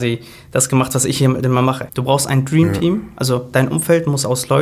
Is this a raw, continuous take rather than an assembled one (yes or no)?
no